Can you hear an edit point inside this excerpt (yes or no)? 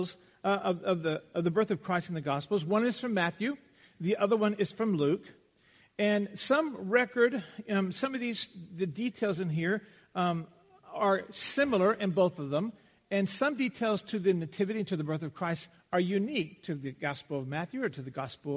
no